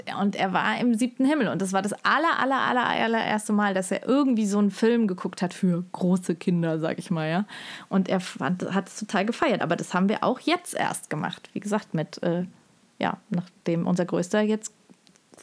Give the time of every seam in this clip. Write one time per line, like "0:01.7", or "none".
none